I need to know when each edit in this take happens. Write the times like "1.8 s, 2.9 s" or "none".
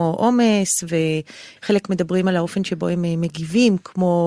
1.6 s